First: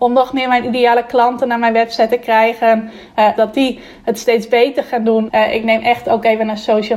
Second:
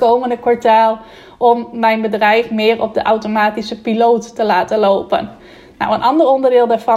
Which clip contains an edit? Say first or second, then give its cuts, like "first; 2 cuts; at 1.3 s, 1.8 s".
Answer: first; 2 cuts; at 3.4 s, 5.3 s